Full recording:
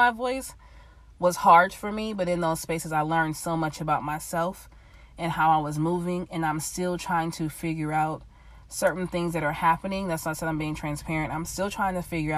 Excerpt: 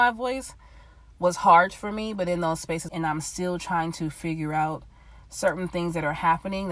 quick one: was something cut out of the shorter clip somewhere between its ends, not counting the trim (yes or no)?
yes